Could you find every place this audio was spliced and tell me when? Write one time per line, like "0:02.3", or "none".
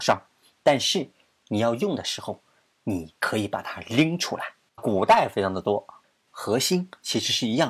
0:04.8
0:06.3